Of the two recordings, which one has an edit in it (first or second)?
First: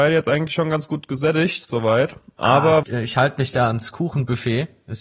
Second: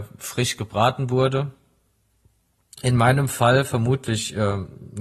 first